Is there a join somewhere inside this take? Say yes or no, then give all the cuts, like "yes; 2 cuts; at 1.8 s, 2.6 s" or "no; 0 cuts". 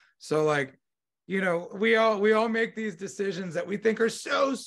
no; 0 cuts